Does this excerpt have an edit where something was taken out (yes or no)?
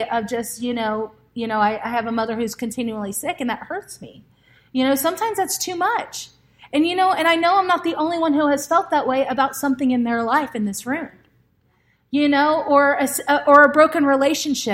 no